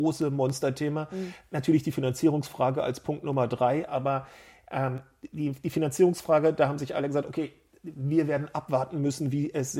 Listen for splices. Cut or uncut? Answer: uncut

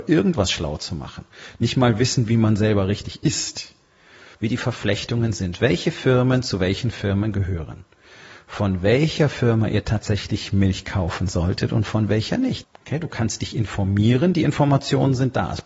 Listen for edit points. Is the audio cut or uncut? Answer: cut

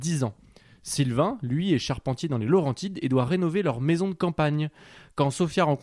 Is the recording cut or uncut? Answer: uncut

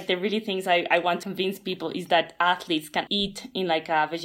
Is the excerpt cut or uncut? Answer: cut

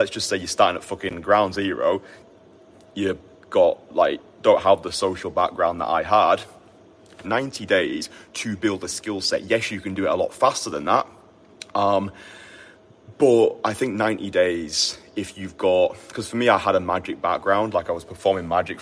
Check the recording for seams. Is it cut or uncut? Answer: cut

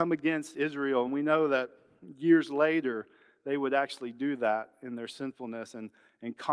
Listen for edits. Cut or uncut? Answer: uncut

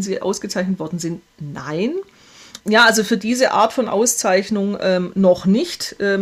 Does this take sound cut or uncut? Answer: cut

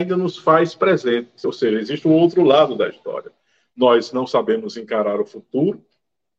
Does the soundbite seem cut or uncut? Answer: uncut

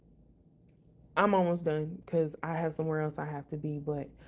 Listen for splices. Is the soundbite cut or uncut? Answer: uncut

